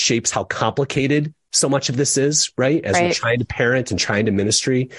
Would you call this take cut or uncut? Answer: uncut